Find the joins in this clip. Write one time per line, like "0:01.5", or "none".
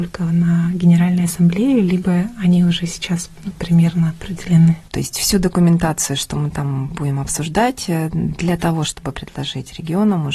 0:04.9